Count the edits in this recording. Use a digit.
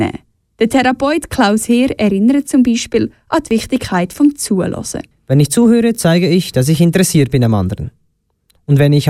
0